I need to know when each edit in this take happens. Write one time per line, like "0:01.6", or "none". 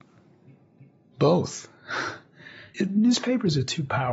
0:02.7